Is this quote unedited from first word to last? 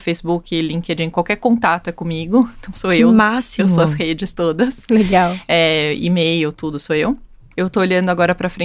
no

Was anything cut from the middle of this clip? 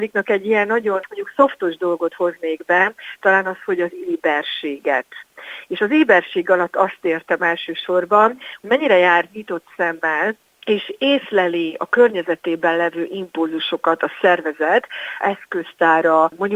yes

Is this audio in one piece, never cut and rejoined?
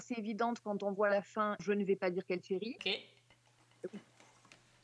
no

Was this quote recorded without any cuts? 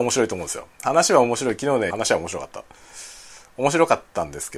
no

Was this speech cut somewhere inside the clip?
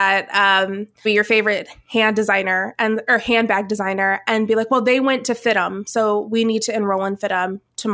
yes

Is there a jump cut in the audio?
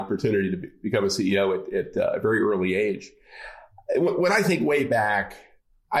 no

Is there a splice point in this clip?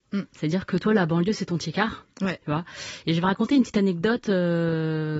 no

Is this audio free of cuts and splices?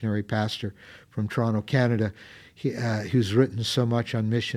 yes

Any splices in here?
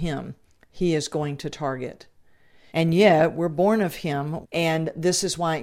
yes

